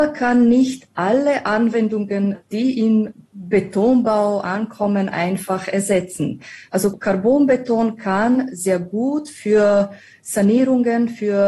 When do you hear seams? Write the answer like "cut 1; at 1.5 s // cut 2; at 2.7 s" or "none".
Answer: none